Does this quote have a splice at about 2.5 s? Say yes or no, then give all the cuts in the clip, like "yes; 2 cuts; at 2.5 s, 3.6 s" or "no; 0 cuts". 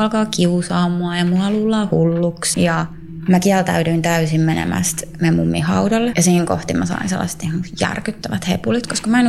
yes; 2 cuts; at 2.5 s, 6.1 s